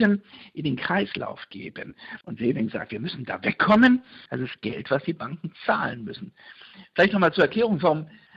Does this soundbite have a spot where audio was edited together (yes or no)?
yes